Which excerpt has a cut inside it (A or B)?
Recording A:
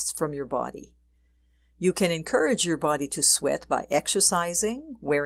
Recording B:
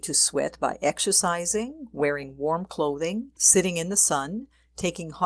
B